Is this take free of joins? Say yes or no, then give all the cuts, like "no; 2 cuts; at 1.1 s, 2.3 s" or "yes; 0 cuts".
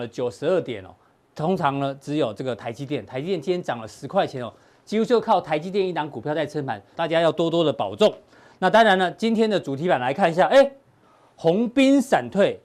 no; 1 cut; at 6.9 s